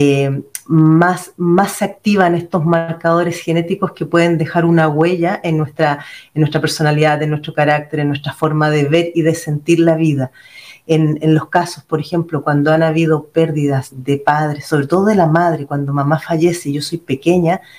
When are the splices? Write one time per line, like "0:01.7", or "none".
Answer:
0:13.9